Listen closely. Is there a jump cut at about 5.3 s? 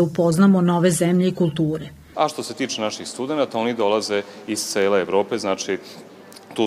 no; 1 cut; at 2.1 s

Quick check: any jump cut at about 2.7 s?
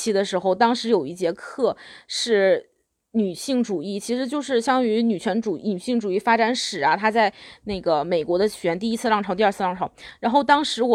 no; 0 cuts

